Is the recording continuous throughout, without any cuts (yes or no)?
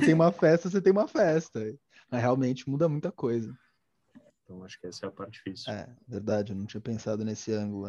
no